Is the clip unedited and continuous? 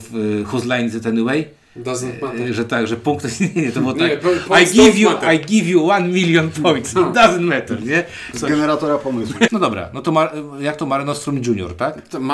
no; 2 cuts; at 8.3 s, 9.5 s

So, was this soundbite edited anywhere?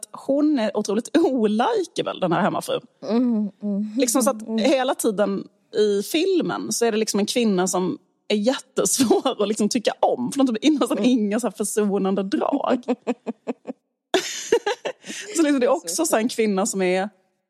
no; 0 cuts

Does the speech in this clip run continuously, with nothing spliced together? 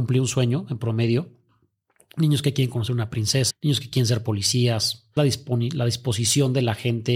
no; 2 cuts; at 3.5 s, 5.2 s

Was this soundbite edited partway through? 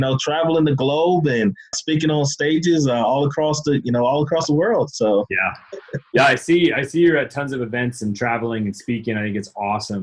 yes; 1 cut; at 1.7 s

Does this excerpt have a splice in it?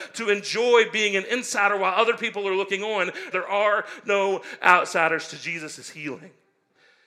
yes; 1 cut; at 3.3 s

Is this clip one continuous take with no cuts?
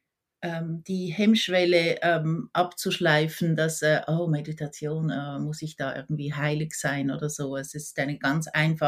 yes; 0 cuts

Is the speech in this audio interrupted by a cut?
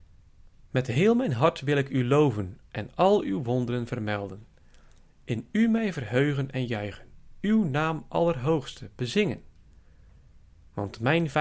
yes; 1 cut; at 2.6 s

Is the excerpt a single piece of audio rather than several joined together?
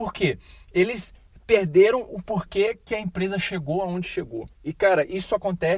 no; 1 cut; at 4.5 s

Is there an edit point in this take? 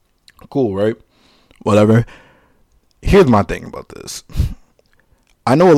no; 0 cuts

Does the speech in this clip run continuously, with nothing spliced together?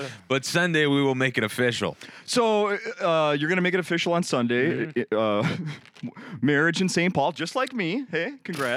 yes; 0 cuts

